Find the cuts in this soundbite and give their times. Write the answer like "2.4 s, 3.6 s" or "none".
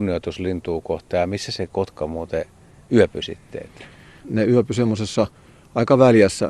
4.2 s

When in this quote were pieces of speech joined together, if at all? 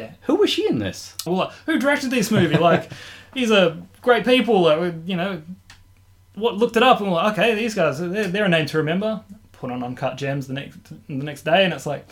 1.3 s

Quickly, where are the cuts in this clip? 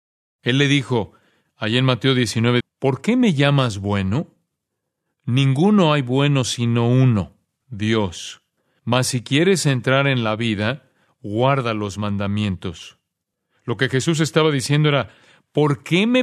2.6 s

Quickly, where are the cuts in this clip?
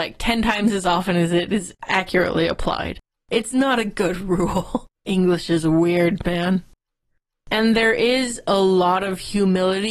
5.0 s

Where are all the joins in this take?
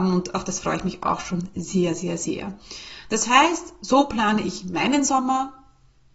none

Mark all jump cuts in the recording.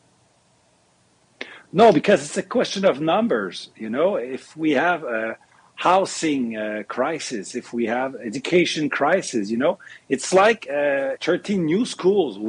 11.2 s

